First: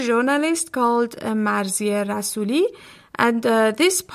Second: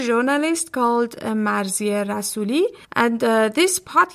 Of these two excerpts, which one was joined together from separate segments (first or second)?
second